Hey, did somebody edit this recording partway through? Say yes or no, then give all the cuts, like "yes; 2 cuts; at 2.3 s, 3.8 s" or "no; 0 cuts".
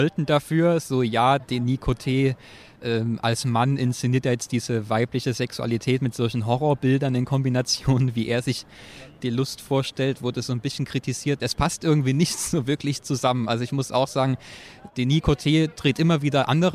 yes; 2 cuts; at 1.4 s, 11.4 s